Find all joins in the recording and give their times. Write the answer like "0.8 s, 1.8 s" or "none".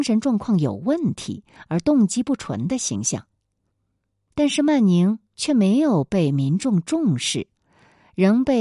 4.3 s